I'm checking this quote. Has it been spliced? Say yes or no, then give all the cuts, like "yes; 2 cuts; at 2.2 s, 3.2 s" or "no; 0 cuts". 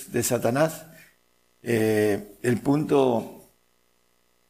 no; 0 cuts